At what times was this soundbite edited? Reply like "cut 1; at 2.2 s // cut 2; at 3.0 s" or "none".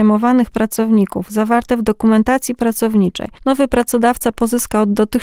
cut 1; at 3.4 s